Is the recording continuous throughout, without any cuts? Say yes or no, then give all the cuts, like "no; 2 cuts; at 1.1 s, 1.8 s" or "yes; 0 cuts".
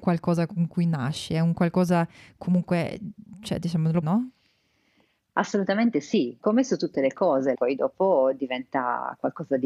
no; 3 cuts; at 4.0 s, 6.4 s, 7.5 s